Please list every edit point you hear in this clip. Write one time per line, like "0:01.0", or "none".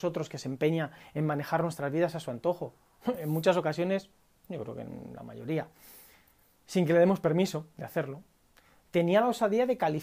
none